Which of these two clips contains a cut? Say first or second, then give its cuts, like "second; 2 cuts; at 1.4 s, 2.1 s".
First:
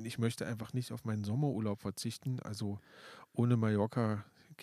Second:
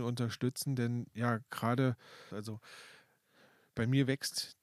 second; 1 cut; at 2.3 s